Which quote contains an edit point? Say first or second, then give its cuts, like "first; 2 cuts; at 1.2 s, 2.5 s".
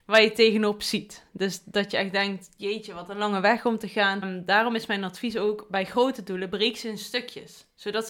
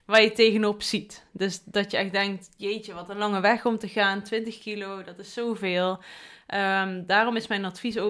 first; 1 cut; at 4.2 s